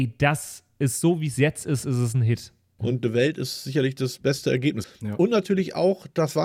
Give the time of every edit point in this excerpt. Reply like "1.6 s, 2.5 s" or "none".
2.8 s, 4.8 s